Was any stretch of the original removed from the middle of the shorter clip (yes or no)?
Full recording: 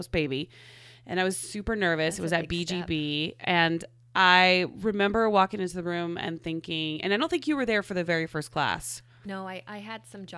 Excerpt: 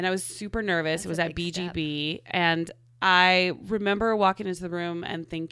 no